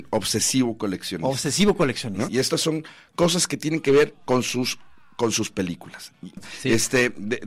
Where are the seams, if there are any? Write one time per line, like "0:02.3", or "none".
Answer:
0:02.3
0:06.4